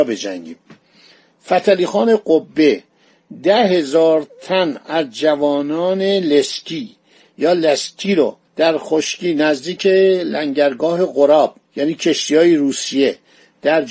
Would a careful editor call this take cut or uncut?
cut